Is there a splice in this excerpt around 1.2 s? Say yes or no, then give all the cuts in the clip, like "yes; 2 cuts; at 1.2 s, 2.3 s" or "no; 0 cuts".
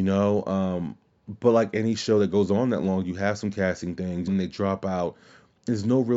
no; 1 cut; at 4.3 s